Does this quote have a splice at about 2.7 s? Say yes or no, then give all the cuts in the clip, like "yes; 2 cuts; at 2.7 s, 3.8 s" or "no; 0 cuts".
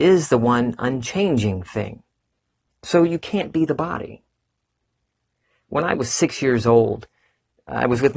yes; 1 cut; at 2.7 s